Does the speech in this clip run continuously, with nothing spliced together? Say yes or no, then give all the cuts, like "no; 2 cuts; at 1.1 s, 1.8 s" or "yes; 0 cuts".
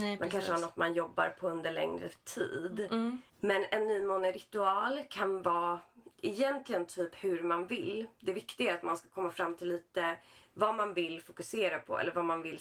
no; 1 cut; at 3.3 s